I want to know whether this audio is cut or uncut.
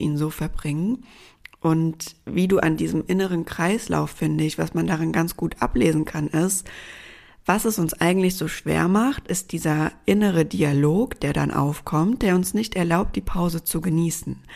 uncut